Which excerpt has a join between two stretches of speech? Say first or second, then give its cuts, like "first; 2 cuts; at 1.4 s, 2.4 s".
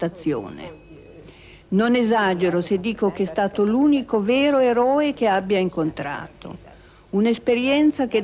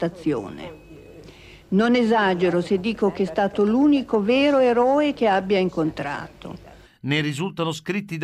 second; 1 cut; at 6.8 s